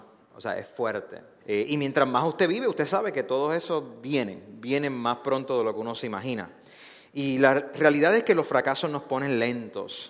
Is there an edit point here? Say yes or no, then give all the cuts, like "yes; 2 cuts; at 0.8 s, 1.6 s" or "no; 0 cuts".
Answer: yes; 1 cut; at 1.4 s